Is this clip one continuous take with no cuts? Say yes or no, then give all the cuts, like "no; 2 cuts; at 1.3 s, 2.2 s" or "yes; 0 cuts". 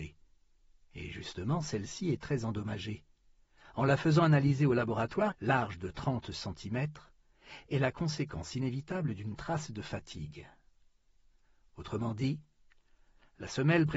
no; 1 cut; at 5.3 s